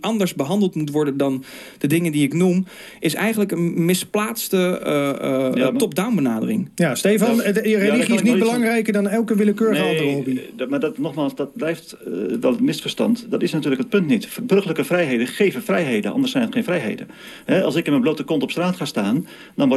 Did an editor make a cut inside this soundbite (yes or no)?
no